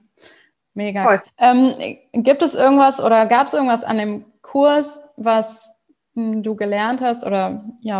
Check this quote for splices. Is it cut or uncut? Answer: cut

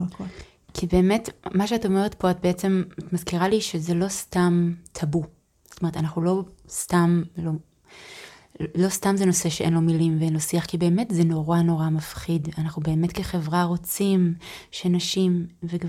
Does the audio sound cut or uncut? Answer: uncut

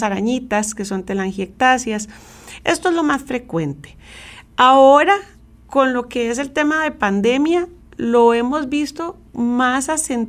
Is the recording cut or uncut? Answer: cut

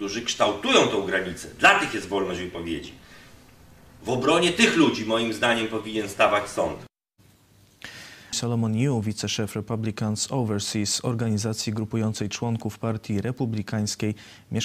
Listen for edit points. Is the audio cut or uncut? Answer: cut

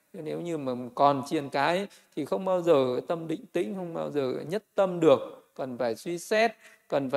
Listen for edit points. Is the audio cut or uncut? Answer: uncut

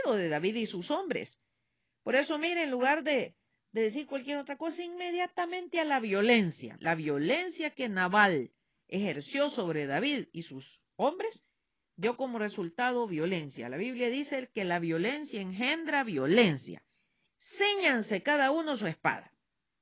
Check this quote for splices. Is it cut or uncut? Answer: cut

